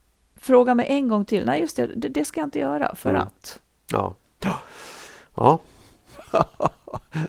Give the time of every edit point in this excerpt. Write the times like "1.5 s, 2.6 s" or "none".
6.1 s